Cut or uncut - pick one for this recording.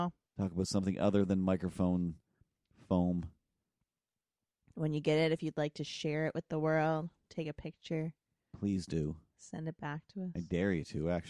uncut